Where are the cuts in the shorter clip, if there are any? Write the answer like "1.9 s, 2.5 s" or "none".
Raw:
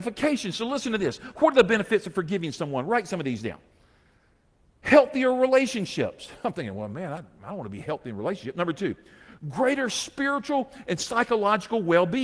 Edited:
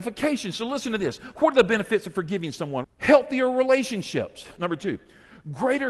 2.8 s, 4.6 s